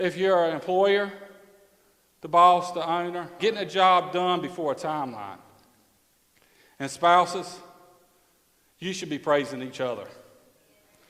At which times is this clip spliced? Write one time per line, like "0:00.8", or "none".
0:03.4